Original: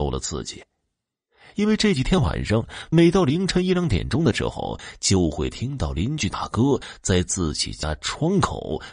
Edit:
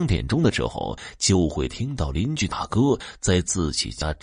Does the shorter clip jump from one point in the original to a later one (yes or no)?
no